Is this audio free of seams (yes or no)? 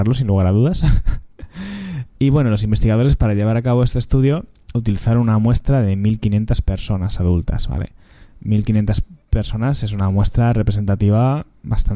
yes